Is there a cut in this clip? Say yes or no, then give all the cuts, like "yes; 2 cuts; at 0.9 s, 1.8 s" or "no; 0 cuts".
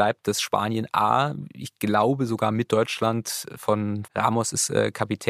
yes; 1 cut; at 4.1 s